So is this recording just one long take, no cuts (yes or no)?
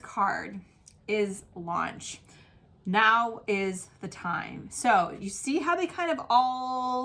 yes